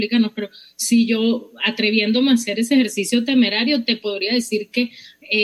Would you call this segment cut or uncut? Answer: uncut